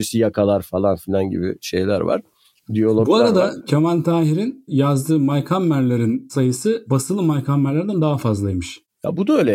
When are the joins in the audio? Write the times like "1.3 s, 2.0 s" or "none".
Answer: 3.6 s